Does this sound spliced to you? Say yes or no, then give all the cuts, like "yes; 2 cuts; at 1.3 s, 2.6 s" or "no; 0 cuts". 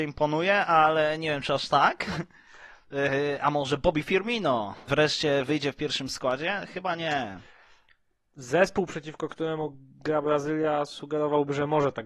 yes; 1 cut; at 4.9 s